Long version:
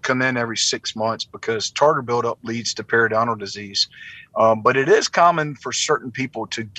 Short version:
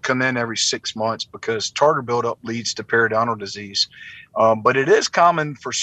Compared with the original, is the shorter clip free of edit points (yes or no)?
yes